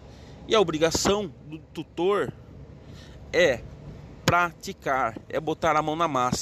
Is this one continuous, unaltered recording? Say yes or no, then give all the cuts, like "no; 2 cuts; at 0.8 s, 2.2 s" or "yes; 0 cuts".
yes; 0 cuts